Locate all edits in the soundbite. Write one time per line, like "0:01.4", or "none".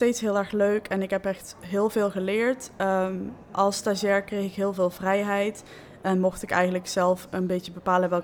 none